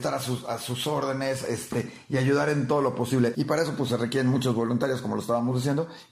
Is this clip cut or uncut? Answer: cut